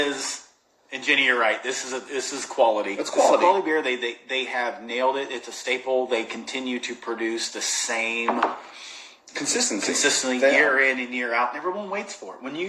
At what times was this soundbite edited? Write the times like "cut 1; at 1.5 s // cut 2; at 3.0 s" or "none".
none